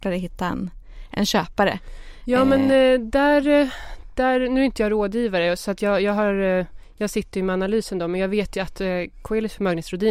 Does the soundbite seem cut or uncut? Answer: uncut